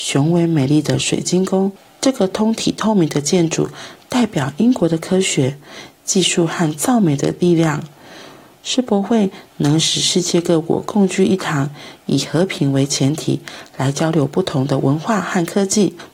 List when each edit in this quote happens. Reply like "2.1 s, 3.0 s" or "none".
none